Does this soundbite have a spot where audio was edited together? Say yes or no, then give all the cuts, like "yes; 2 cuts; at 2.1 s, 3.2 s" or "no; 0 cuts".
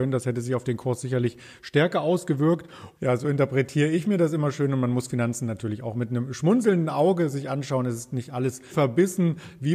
yes; 2 cuts; at 2.9 s, 8.7 s